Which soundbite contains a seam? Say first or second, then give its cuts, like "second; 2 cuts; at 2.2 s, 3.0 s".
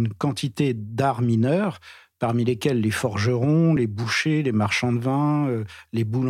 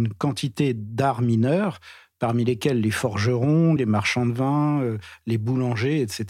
second; 1 cut; at 3.8 s